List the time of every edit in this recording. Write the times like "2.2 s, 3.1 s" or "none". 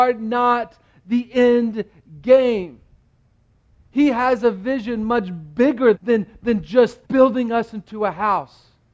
5.9 s, 7.0 s